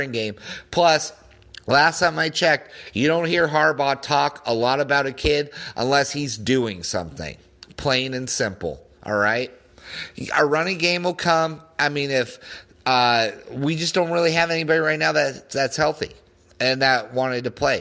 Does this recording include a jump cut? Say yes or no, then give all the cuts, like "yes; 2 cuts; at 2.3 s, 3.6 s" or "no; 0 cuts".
no; 0 cuts